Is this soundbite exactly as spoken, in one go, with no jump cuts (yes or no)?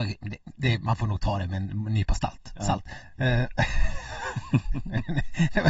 yes